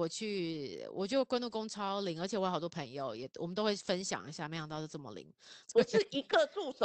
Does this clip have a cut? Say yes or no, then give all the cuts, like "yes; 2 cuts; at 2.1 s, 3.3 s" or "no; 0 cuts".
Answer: yes; 1 cut; at 5.6 s